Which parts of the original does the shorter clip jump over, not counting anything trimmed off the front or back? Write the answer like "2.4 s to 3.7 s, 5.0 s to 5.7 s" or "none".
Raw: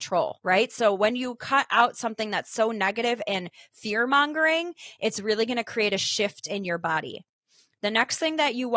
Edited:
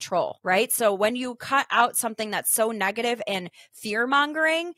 none